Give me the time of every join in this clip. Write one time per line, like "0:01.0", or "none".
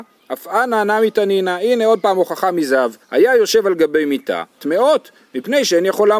0:03.0
0:04.6